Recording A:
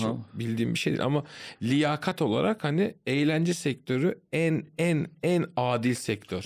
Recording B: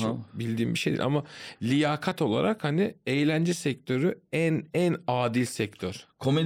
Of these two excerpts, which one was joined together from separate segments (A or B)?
B